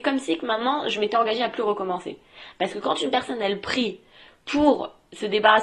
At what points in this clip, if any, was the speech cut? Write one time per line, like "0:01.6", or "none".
none